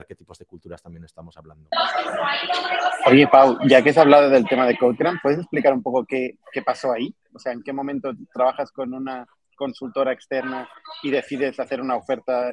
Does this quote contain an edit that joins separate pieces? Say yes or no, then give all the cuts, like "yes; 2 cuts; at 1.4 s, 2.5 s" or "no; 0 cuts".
no; 0 cuts